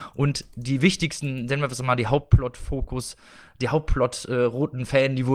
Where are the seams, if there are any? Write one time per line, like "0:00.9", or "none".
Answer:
none

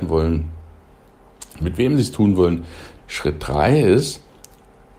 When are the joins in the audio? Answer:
0:01.6
0:03.0

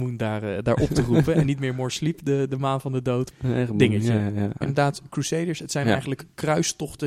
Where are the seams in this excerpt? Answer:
0:03.3
0:04.6

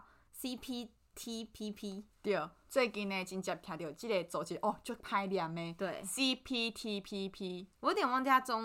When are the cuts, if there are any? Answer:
none

